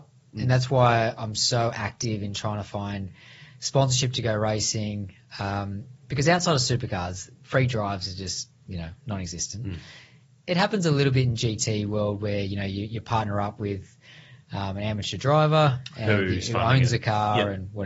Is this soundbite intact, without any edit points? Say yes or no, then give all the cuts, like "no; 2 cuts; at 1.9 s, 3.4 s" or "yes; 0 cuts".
yes; 0 cuts